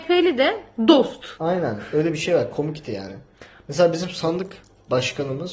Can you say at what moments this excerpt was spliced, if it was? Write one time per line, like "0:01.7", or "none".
0:01.3

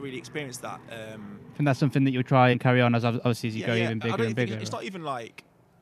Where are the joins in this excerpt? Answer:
0:02.5

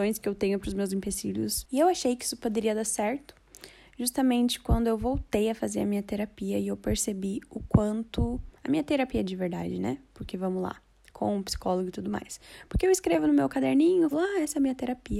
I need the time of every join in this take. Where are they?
0:14.1

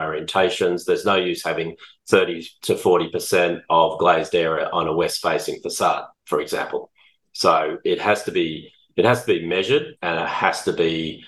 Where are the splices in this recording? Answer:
0:10.0

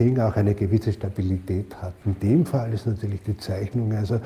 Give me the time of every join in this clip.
0:02.0

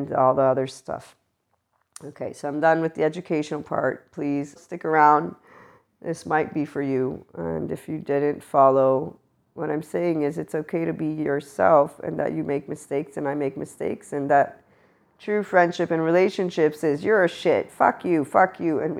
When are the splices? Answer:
0:04.6
0:17.7

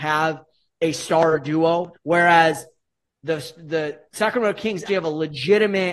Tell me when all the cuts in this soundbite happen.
0:01.9
0:04.9

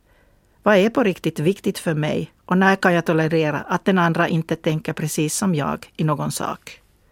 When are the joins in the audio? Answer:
none

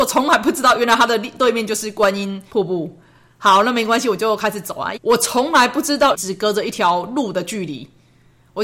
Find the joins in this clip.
0:05.0
0:06.1

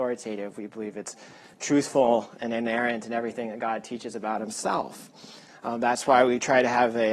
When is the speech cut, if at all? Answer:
0:05.5

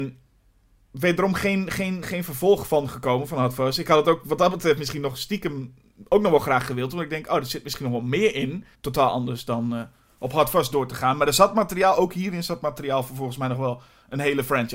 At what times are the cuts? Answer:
0:02.0
0:08.7

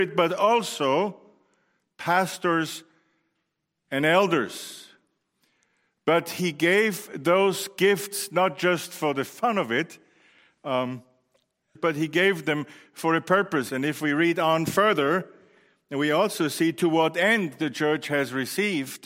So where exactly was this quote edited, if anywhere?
0:11.7
0:13.7

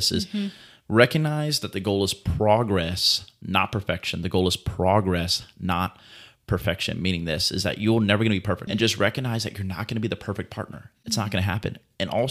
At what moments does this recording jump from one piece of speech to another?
0:08.7

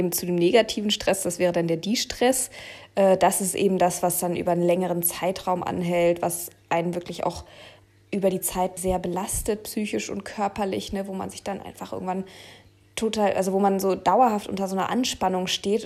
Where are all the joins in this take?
0:08.8

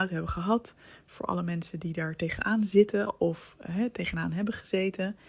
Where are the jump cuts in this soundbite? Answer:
none

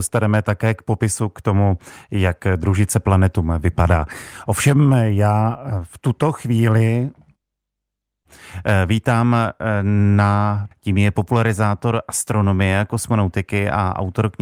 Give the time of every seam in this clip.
0:10.7

